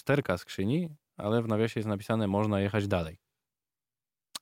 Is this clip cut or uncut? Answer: uncut